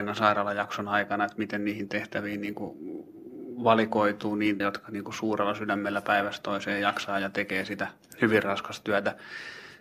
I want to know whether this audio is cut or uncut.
cut